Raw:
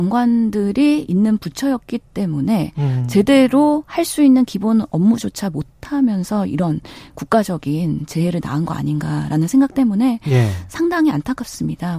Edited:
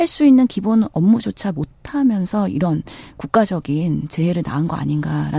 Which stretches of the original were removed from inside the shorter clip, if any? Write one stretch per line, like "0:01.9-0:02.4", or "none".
none